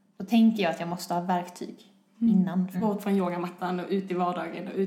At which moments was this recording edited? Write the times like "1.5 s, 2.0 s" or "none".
2.7 s